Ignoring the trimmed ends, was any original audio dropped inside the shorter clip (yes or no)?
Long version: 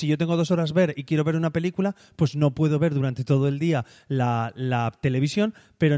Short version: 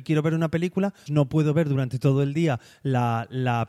yes